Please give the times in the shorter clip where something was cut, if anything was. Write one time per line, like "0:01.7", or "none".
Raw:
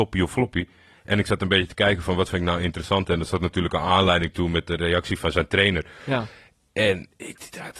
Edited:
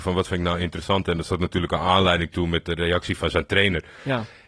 none